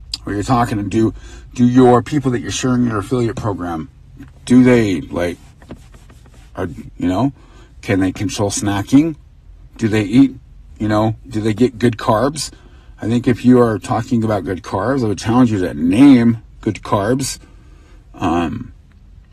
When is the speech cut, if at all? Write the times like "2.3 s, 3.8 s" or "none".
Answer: 6.9 s